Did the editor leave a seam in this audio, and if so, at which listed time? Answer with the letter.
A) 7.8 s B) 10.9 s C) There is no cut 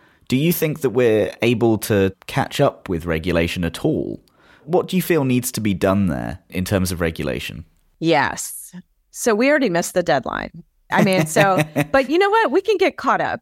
B